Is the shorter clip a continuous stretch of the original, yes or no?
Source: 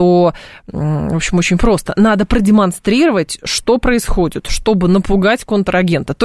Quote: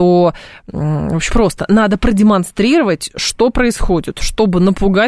no